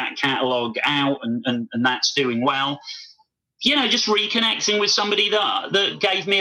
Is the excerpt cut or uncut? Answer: uncut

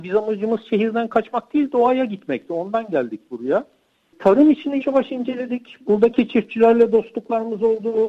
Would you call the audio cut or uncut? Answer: cut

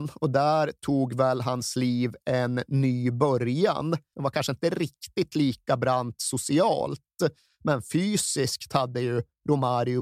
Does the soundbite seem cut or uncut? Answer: cut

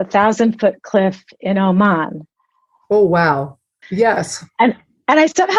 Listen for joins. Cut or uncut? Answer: cut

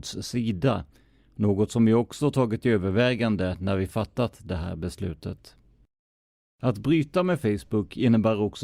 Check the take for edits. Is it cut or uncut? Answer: uncut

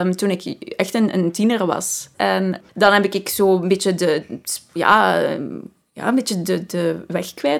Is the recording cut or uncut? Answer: cut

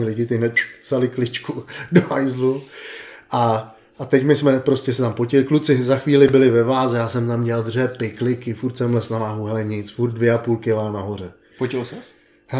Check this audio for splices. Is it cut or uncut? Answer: cut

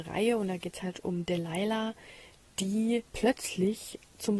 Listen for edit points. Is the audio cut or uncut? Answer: cut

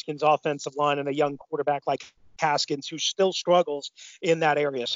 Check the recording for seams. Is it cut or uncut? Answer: uncut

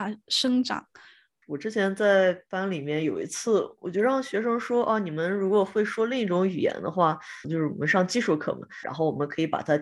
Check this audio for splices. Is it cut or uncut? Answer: cut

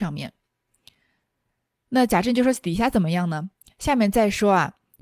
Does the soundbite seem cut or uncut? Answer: uncut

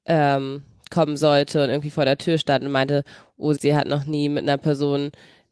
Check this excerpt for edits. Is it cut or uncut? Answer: cut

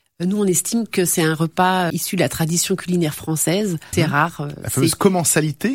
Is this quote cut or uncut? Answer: cut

